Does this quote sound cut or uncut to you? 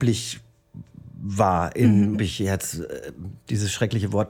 cut